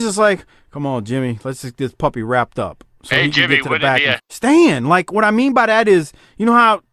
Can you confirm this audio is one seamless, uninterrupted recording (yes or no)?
no